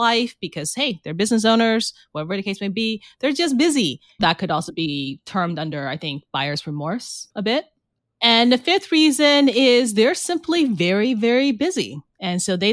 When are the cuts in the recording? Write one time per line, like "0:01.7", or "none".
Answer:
0:04.2